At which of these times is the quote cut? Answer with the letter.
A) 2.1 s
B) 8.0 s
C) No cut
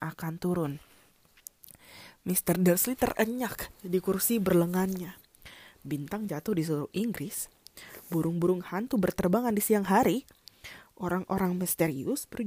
C